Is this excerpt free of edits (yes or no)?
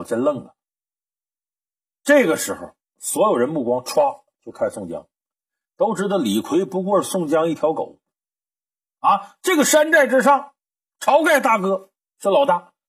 no